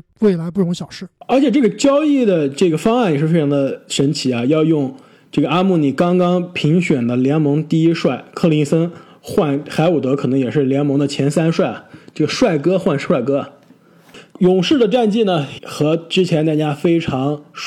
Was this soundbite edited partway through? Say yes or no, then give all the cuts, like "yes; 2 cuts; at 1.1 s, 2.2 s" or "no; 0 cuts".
yes; 2 cuts; at 14.3 s, 15.6 s